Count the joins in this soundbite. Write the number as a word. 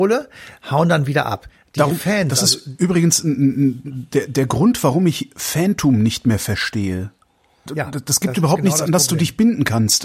one